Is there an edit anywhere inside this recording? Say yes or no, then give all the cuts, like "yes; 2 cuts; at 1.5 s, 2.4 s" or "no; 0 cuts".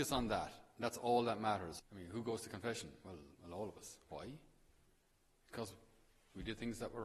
yes; 1 cut; at 1.8 s